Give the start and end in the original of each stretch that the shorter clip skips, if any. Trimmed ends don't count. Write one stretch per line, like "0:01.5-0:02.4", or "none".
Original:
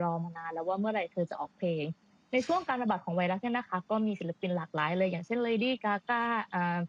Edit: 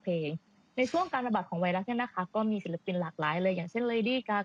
none